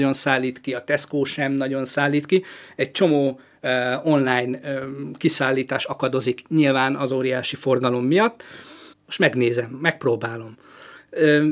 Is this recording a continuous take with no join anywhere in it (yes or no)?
no